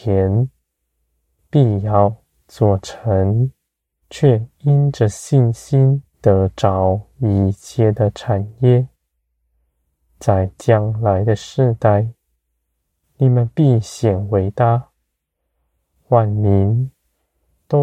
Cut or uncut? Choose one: cut